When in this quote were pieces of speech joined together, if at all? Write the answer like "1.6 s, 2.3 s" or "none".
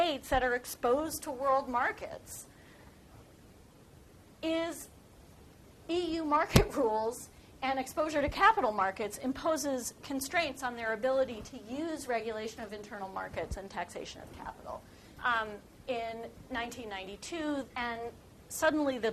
15.2 s, 17.7 s